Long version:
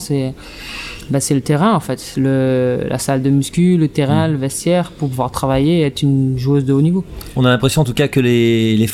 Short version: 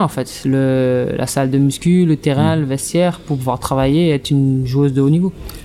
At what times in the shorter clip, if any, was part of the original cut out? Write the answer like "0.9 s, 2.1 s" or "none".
none